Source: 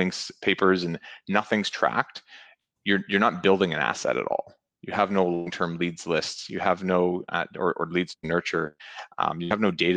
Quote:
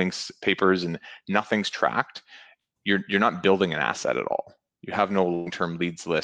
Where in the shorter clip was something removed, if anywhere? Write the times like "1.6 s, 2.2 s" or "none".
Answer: none